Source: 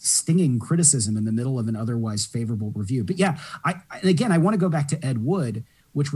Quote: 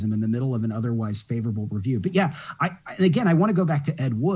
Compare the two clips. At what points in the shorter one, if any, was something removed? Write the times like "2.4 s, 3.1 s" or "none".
none